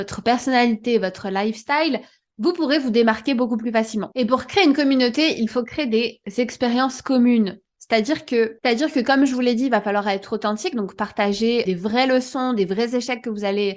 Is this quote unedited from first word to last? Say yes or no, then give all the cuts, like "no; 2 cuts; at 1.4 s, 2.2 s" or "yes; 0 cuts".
yes; 0 cuts